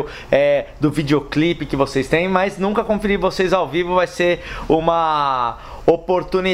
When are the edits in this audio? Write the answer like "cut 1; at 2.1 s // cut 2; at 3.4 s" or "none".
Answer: none